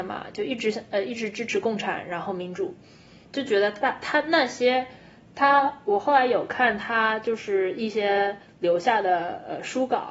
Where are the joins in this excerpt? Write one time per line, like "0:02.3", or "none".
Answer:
0:03.2